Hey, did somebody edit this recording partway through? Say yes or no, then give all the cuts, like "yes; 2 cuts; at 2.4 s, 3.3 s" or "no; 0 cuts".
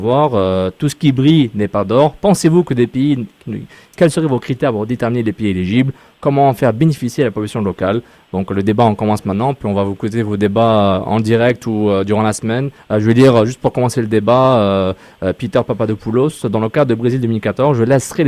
yes; 2 cuts; at 3.8 s, 12.8 s